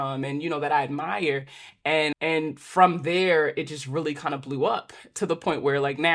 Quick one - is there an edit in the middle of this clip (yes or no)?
yes